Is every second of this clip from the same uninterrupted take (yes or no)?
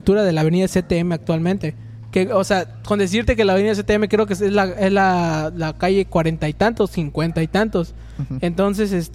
yes